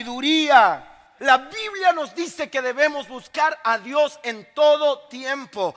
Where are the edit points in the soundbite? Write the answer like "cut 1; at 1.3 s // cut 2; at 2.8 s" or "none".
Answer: cut 1; at 1.2 s